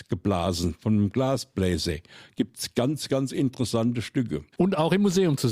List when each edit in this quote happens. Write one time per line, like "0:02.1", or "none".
0:04.5